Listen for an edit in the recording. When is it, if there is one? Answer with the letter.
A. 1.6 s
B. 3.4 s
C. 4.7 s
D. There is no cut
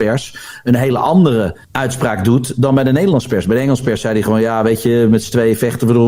A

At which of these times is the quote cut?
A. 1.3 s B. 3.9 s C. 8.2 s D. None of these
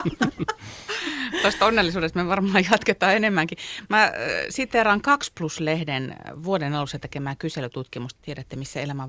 C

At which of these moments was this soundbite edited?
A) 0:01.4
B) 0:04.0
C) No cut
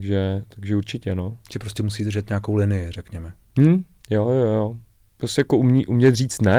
C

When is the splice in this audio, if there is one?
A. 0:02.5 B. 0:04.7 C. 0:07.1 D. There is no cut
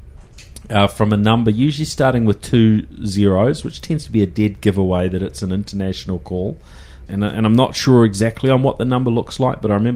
C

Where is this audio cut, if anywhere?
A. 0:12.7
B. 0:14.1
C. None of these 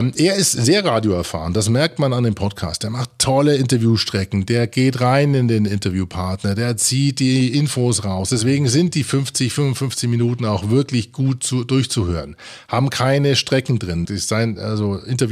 B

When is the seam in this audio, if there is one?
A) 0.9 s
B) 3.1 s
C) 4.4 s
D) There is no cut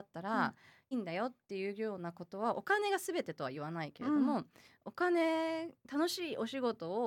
A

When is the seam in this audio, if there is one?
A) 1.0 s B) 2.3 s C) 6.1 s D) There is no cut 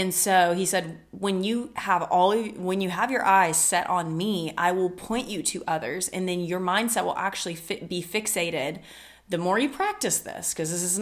D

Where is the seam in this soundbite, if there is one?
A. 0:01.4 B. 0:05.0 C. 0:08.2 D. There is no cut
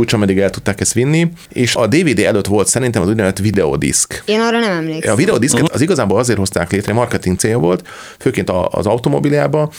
D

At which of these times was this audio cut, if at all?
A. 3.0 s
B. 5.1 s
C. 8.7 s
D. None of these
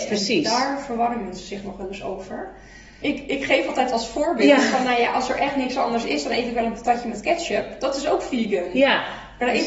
A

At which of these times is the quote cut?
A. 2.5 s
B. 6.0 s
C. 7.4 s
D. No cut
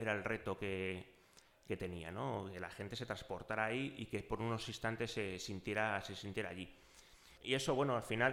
C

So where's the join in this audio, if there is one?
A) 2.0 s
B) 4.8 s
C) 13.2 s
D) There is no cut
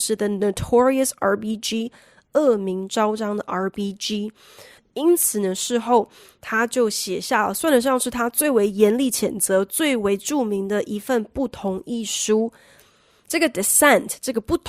B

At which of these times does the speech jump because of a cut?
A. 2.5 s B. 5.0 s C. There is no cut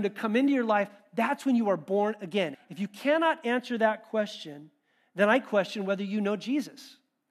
A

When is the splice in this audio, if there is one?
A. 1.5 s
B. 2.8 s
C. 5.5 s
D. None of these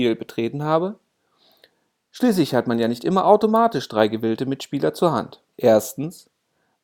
C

